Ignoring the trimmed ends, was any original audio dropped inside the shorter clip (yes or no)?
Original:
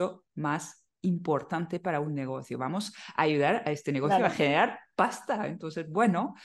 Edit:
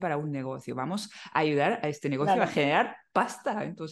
no